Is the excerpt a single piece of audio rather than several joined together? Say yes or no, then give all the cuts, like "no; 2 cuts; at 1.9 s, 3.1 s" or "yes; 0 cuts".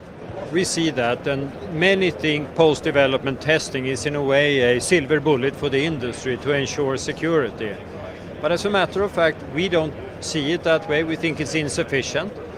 yes; 0 cuts